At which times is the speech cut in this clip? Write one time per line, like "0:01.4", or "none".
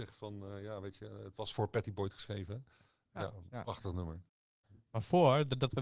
0:03.1